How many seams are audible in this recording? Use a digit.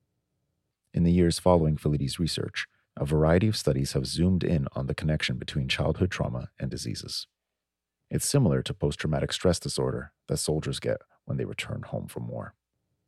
1